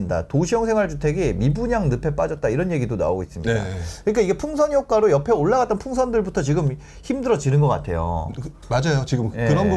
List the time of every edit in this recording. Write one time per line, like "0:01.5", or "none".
none